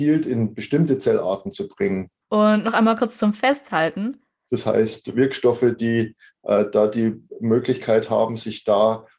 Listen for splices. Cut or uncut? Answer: cut